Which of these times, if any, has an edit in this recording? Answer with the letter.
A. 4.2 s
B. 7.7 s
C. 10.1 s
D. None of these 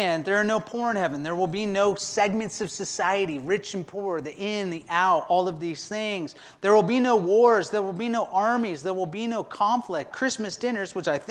C